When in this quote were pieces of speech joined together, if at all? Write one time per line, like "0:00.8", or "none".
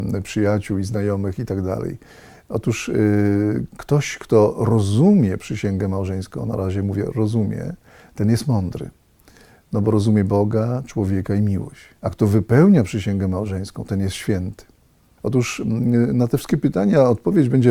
0:12.0
0:15.2